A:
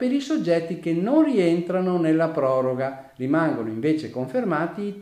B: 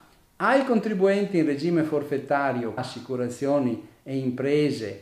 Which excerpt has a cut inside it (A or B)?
B